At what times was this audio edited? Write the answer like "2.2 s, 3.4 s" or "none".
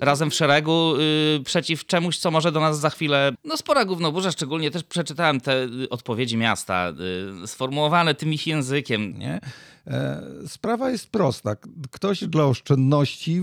3.3 s, 9.1 s

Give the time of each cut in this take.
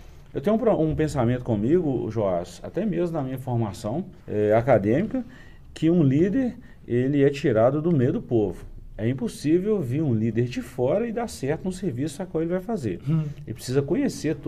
4.2 s

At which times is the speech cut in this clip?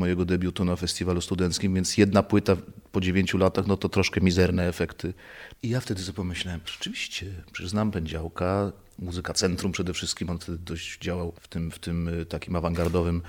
5.6 s, 6.6 s, 11.3 s

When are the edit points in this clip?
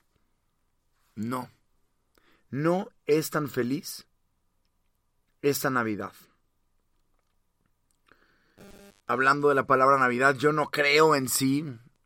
none

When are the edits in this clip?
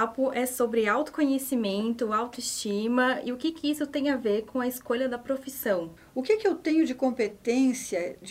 6.0 s

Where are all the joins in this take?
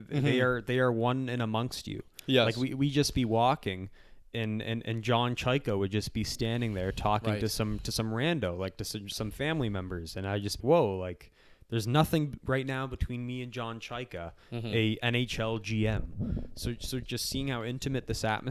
10.6 s, 17.0 s

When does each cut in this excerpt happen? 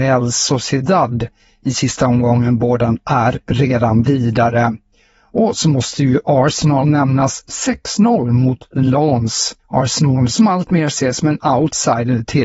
9.6 s

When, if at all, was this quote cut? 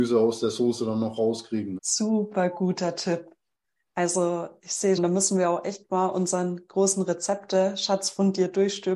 1.8 s, 5.0 s

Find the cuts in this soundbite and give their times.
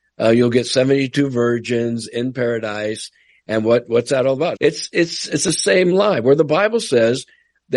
4.6 s

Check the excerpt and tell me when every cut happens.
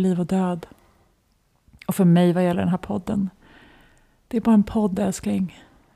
none

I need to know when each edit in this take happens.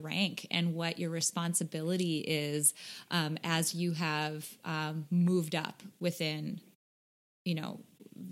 none

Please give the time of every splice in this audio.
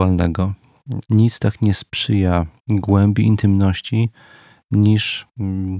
1.0 s, 2.6 s

